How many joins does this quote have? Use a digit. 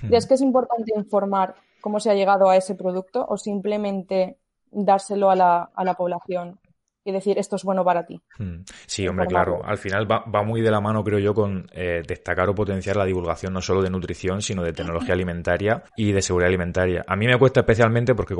1